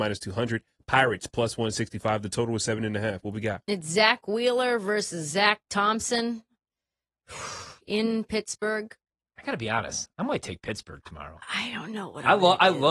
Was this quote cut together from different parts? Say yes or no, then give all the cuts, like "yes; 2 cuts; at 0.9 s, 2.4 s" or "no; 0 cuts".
no; 0 cuts